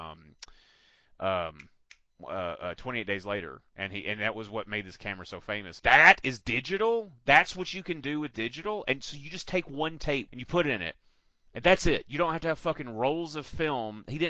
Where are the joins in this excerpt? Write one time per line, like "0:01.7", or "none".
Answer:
0:05.8
0:10.3